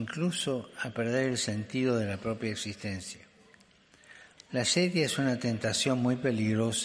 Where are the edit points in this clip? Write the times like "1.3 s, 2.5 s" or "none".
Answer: 4.4 s